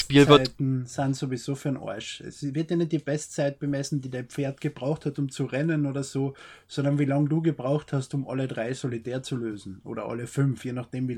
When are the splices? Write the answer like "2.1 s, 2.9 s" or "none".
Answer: none